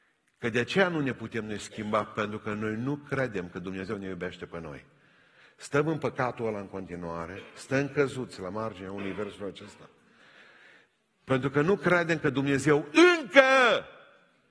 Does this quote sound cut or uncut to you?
uncut